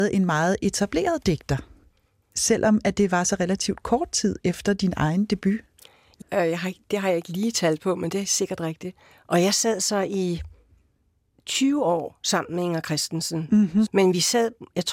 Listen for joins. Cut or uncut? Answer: cut